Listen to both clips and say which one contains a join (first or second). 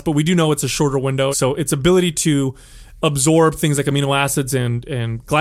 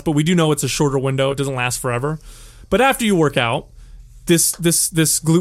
first